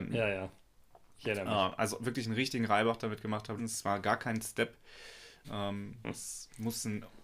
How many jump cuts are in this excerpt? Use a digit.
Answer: 2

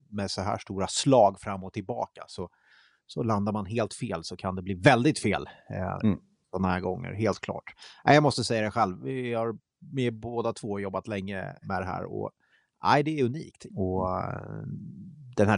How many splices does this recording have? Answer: 2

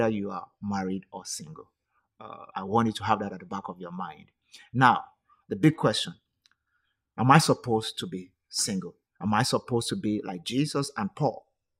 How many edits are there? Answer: 2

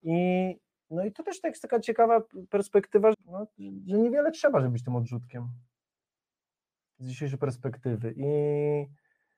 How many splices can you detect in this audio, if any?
1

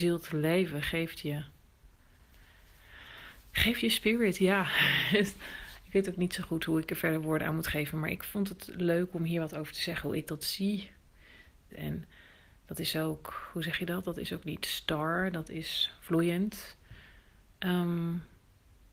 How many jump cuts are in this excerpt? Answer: 1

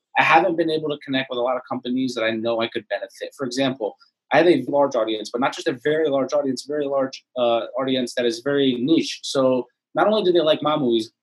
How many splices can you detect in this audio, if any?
2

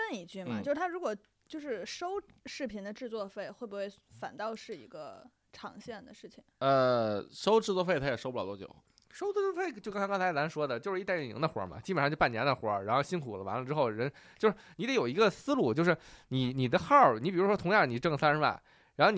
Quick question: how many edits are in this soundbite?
0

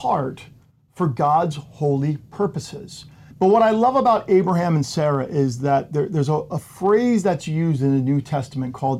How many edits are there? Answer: 1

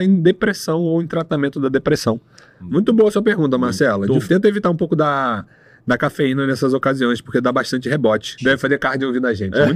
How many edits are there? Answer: 2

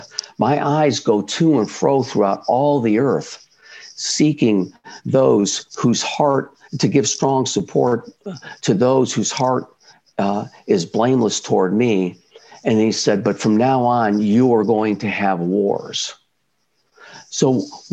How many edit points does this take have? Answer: 0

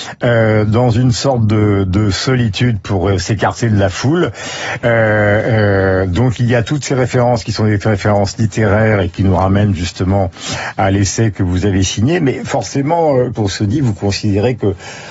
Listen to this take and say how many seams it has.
1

